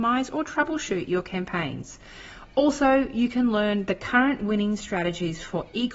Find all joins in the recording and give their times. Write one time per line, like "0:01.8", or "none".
none